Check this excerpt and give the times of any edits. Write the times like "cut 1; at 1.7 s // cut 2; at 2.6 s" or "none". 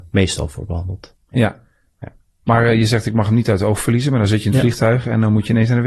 none